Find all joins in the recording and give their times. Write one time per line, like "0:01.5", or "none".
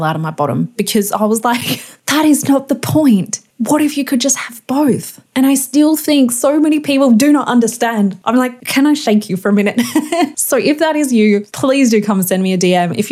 none

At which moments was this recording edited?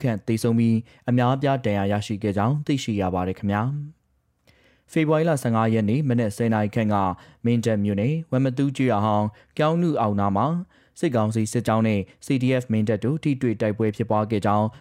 0:04.0

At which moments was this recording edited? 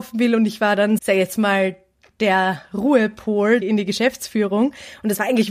0:01.0
0:03.6

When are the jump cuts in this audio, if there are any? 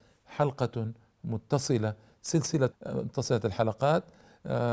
0:02.7

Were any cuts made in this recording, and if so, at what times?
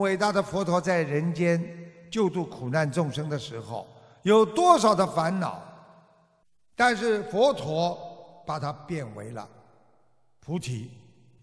none

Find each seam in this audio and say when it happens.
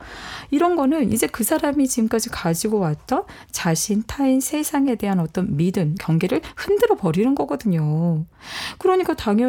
0:06.0

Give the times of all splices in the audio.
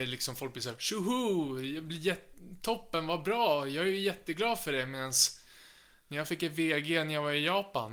none

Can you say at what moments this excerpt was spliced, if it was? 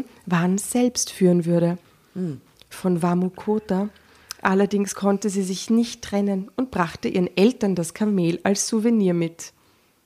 none

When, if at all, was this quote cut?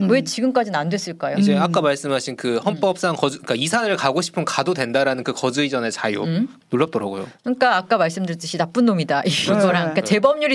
0:06.6

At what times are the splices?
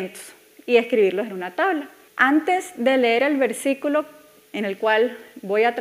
0:02.1

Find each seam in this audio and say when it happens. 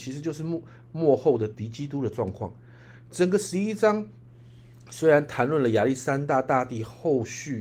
none

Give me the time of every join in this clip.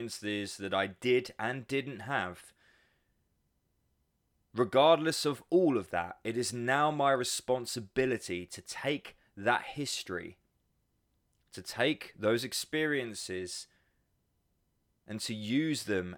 none

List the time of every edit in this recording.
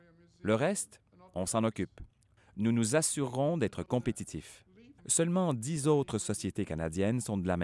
0:05.0

